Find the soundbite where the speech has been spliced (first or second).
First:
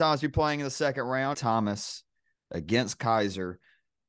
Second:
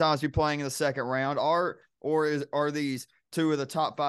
first